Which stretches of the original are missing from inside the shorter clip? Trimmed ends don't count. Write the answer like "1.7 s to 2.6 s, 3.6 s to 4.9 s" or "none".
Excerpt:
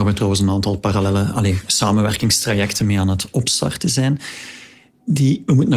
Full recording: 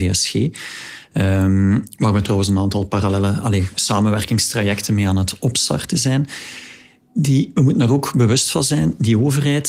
none